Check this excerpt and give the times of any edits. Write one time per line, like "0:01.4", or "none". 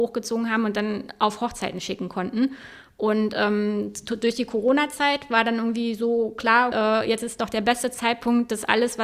0:06.7